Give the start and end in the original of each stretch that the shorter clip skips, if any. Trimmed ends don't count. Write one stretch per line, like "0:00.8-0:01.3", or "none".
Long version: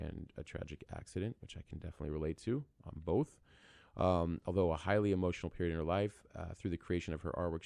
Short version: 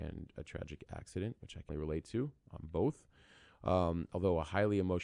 0:01.7-0:02.0